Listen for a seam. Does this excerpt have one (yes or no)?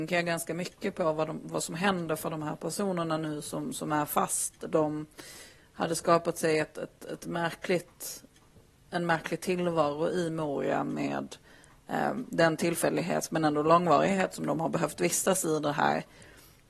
no